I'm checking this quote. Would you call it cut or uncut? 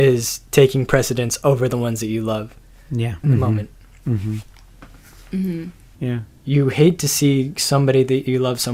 cut